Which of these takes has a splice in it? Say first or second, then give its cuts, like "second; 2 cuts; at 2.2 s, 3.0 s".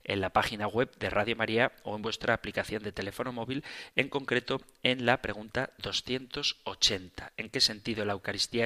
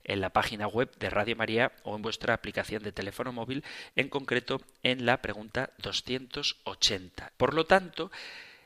second; 1 cut; at 7.3 s